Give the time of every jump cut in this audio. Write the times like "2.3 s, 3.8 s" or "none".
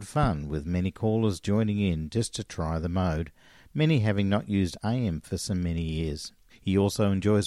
6.5 s

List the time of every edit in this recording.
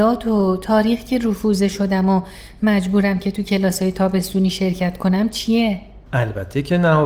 6.1 s

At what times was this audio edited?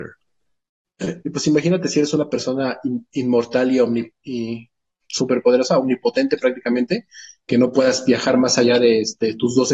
1.2 s

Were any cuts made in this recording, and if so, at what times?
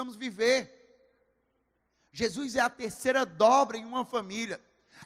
none

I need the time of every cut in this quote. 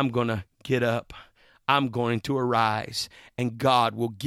none

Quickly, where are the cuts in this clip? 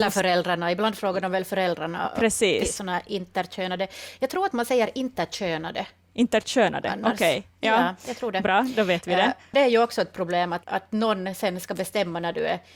10.6 s

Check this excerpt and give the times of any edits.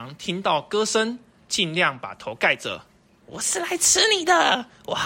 1.4 s, 3.2 s

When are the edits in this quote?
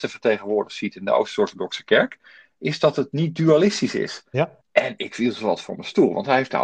4.6 s

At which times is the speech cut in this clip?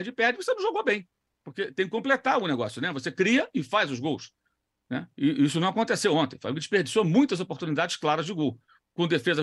none

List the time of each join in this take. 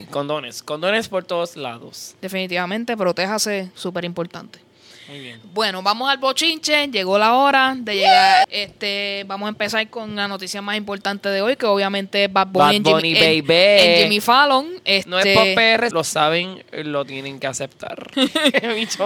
8.4 s, 15.9 s, 18.1 s

